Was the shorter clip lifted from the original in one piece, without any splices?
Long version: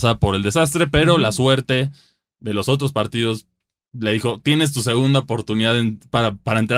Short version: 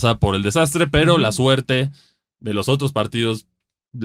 yes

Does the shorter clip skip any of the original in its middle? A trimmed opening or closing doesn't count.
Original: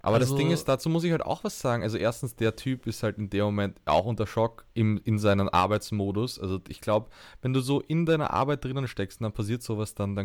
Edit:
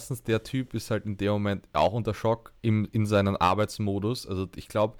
no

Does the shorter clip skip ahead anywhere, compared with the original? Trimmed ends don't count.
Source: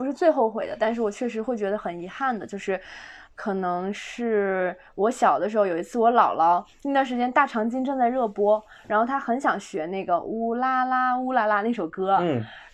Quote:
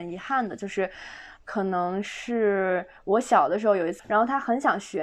yes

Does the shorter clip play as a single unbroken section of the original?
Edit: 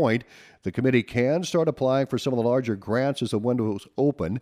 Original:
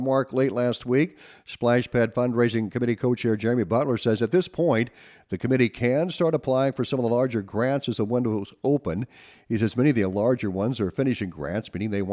yes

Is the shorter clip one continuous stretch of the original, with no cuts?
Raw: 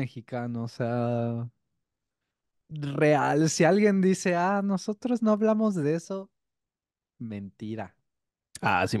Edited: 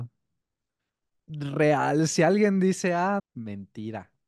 no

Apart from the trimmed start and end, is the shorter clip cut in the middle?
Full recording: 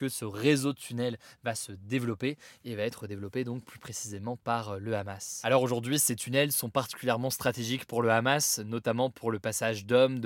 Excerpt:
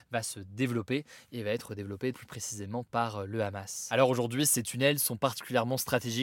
yes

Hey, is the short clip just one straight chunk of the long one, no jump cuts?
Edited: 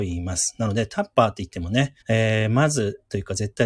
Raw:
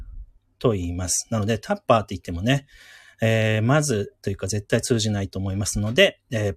no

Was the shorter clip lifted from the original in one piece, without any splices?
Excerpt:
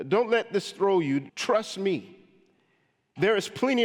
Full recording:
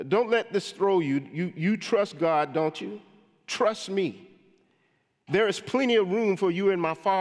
no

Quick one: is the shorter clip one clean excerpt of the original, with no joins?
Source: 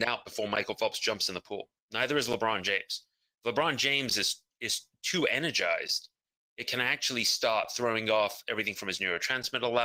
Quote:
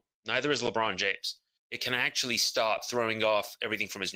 no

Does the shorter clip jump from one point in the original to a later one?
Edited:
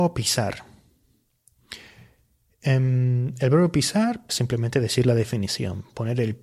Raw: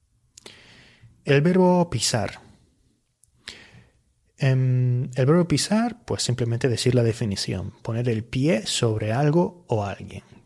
yes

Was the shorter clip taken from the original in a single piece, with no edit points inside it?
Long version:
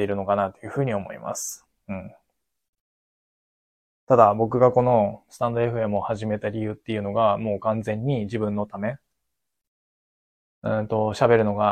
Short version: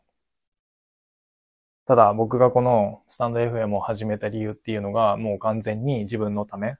yes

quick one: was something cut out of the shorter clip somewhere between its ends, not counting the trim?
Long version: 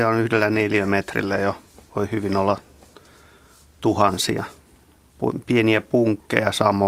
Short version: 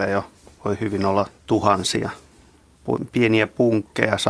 yes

